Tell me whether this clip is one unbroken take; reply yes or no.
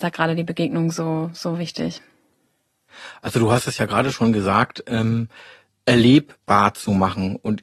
yes